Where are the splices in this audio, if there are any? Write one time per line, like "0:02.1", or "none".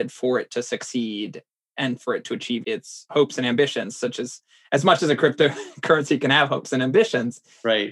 0:02.6